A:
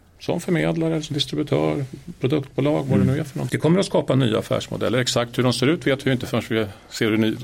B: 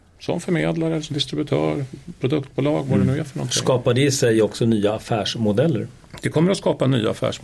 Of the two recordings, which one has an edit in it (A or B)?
A